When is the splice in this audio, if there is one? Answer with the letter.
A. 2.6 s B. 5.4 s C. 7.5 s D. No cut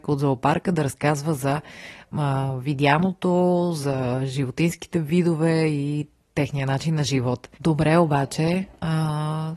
C